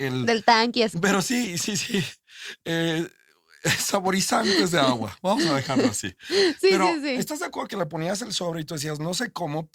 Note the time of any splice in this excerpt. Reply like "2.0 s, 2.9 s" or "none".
0.9 s